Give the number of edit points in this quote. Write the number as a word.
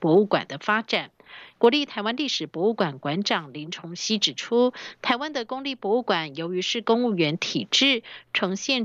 one